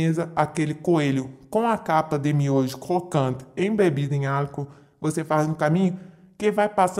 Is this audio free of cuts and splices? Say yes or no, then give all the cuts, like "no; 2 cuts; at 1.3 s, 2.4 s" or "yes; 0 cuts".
yes; 0 cuts